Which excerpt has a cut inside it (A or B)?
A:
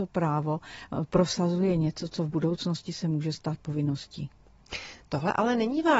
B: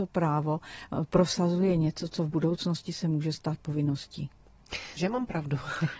B